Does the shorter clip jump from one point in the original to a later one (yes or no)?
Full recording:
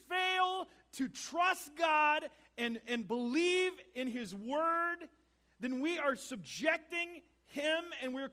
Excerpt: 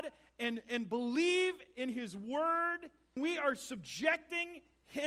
yes